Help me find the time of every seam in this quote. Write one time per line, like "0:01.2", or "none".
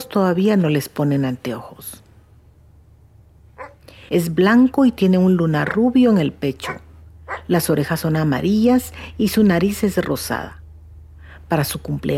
0:04.1